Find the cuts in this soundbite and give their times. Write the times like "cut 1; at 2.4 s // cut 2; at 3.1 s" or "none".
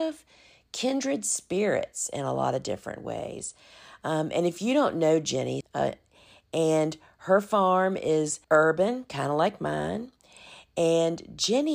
cut 1; at 5.6 s // cut 2; at 8.4 s